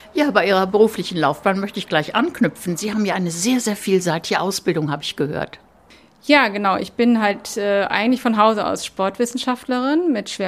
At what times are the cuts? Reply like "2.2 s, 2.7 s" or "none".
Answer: none